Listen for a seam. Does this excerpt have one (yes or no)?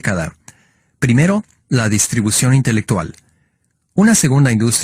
no